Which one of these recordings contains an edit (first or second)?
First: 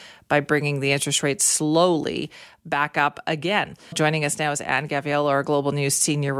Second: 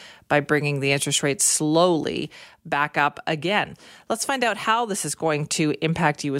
first